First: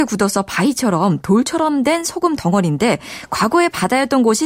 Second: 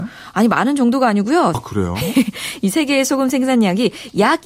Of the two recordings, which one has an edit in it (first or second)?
second